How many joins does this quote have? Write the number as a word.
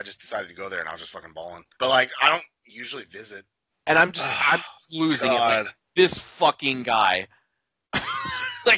two